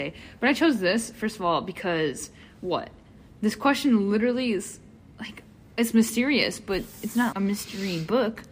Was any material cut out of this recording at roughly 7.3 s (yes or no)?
yes